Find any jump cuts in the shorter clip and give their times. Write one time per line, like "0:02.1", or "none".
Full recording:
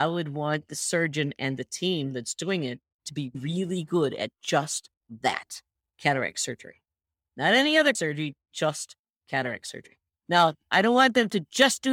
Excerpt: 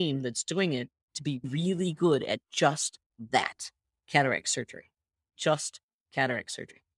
0:05.3